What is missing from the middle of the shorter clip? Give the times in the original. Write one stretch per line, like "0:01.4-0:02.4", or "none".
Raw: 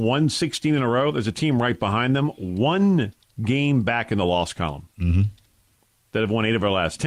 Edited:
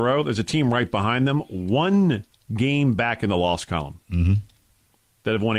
none